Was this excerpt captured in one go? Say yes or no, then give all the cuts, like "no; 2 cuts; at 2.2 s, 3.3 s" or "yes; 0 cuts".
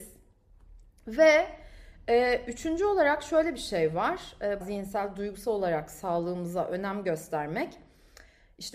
no; 1 cut; at 4.6 s